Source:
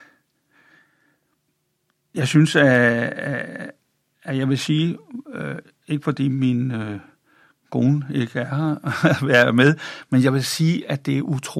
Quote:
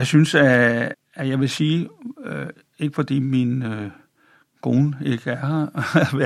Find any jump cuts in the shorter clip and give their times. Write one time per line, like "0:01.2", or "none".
0:00.9